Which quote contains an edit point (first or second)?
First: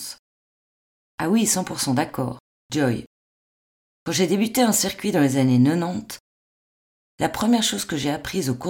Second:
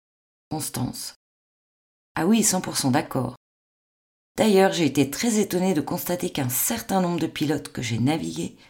first